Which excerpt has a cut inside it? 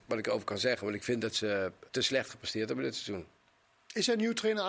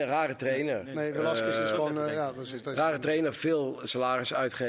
first; 1 cut; at 1.9 s

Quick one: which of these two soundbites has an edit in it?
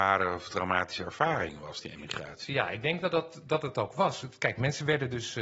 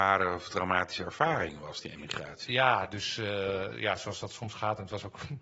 second; 1 cut; at 2.5 s

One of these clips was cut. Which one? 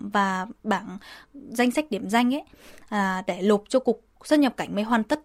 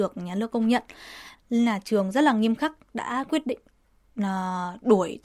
second; 1 cut; at 1.3 s

